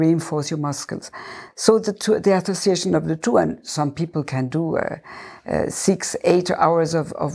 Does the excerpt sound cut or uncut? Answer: uncut